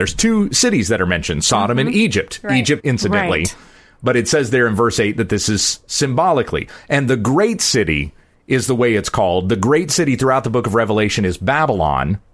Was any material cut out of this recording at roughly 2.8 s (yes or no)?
yes